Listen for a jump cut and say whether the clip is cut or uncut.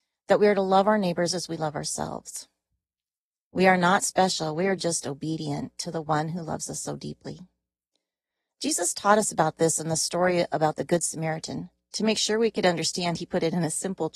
uncut